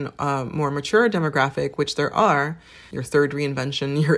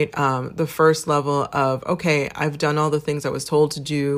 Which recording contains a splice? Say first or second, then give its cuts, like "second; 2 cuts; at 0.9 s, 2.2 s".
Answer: first; 1 cut; at 2.9 s